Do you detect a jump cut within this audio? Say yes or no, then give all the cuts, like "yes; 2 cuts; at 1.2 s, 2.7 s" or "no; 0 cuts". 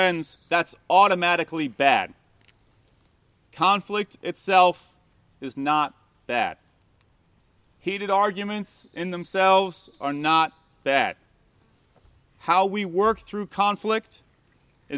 no; 0 cuts